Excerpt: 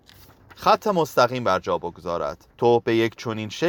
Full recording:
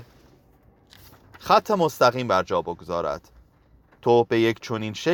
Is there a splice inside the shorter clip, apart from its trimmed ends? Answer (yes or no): yes